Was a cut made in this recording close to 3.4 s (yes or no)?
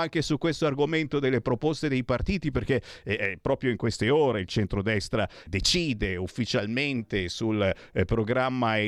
no